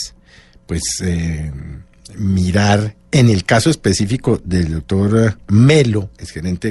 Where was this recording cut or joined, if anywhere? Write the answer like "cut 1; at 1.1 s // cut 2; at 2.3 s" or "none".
none